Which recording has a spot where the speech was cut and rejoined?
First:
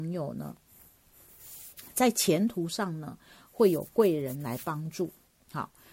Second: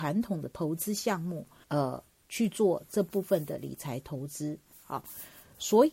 second; 2 cuts; at 1.6 s, 4.7 s

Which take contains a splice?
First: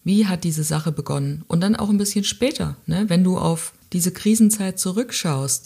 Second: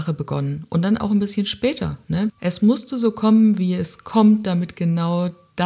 second; 1 cut; at 2.3 s

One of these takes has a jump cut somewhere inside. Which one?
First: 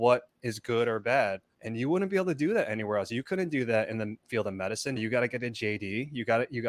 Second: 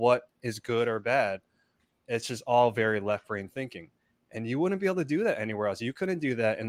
first; 2 cuts; at 1.5 s, 5.0 s

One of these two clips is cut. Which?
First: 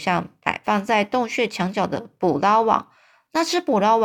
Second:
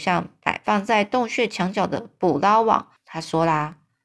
second; 1 cut; at 3.0 s

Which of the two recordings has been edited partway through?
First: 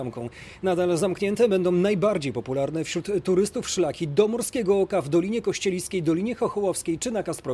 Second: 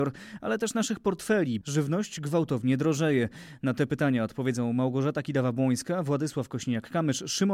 second; 1 cut; at 1.6 s

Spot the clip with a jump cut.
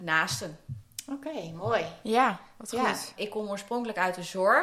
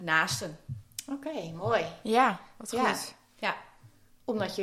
first; 1 cut; at 3.2 s

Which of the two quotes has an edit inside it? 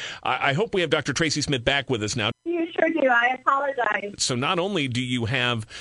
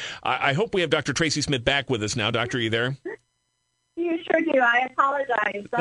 first; 2 cuts; at 2.3 s, 4.2 s

